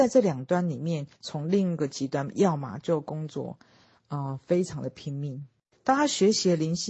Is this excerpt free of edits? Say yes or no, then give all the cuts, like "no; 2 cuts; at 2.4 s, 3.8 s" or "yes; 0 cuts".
yes; 0 cuts